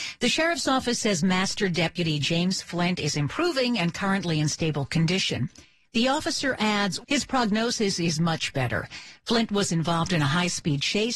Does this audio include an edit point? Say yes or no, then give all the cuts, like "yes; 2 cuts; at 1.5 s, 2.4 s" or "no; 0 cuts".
yes; 1 cut; at 7.0 s